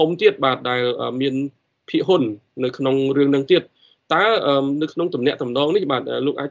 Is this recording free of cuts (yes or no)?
yes